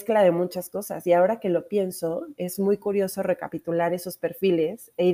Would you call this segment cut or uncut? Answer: uncut